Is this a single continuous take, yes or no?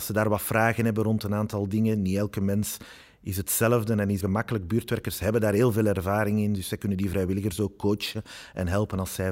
no